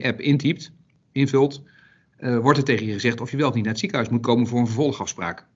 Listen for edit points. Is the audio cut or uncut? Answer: uncut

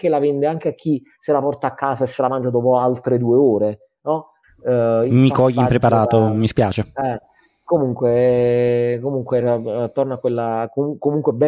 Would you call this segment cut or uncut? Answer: cut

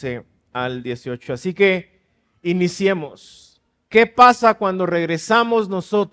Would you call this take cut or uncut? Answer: uncut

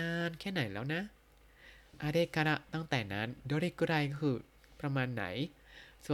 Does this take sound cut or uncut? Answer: uncut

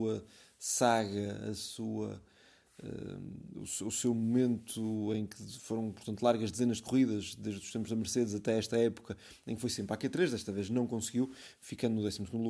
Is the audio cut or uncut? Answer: uncut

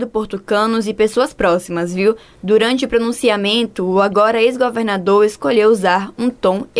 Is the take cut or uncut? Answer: uncut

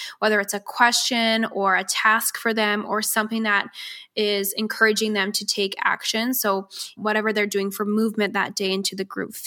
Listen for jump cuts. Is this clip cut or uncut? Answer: cut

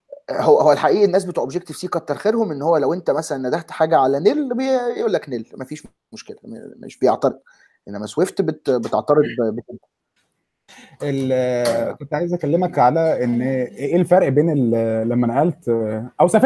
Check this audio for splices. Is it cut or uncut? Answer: uncut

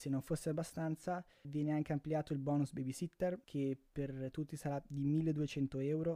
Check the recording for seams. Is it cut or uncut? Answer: cut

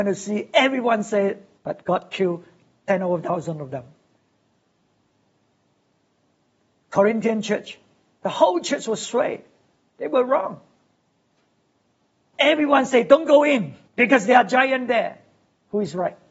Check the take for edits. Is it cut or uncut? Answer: cut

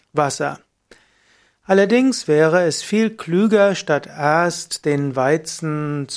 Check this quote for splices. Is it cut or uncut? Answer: uncut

